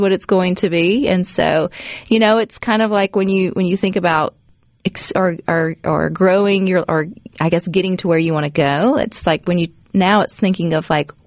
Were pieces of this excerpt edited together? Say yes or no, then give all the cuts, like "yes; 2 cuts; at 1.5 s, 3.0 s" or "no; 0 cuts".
no; 0 cuts